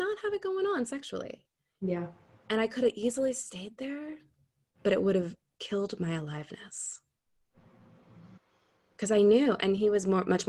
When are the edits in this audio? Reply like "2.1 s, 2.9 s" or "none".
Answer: none